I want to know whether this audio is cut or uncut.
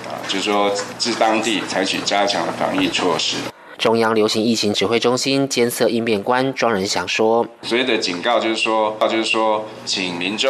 cut